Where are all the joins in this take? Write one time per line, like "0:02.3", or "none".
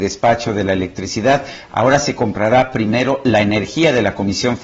0:01.7